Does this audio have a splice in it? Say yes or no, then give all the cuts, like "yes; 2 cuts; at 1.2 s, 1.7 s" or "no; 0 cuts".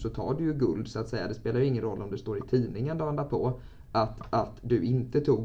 no; 0 cuts